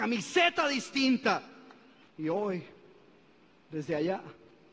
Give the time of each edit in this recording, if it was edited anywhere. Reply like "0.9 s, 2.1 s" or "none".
2.0 s